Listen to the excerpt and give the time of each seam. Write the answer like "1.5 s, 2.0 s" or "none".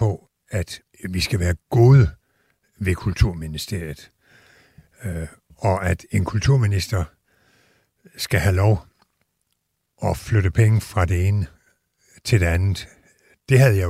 none